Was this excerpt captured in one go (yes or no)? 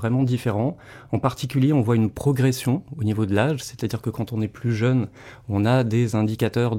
yes